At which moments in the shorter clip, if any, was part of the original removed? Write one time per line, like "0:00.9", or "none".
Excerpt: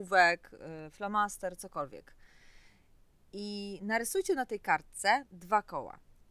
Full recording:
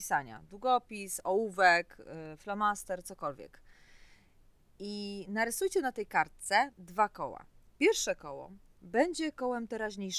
none